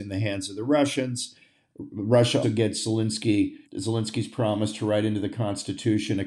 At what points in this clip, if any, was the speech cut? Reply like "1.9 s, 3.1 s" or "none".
2.4 s, 3.7 s